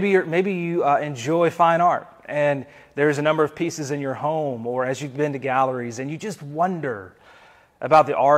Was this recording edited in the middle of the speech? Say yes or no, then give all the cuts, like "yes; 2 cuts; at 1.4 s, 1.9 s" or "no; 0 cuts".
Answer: no; 0 cuts